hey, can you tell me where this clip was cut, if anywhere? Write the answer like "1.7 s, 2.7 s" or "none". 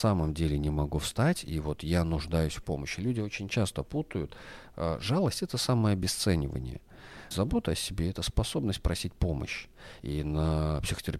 7.3 s, 10.0 s